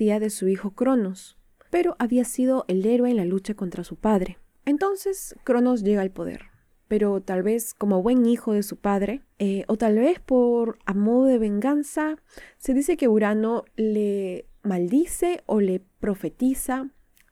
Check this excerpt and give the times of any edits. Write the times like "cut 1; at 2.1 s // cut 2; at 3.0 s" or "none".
cut 1; at 1.7 s